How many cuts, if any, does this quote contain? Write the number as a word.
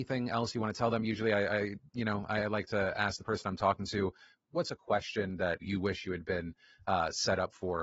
two